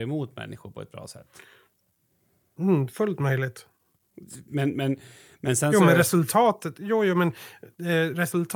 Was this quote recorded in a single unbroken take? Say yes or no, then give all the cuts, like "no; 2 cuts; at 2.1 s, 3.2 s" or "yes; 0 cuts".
yes; 0 cuts